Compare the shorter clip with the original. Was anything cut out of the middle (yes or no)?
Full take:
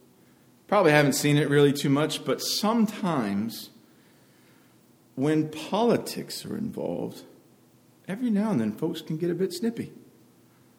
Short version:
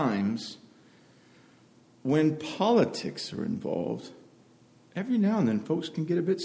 no